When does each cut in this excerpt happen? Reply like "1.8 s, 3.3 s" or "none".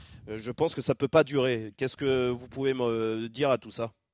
none